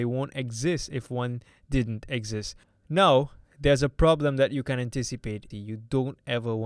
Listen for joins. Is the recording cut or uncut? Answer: cut